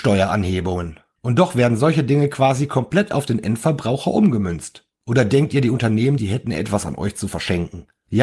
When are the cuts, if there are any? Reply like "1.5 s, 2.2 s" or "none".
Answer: 6.2 s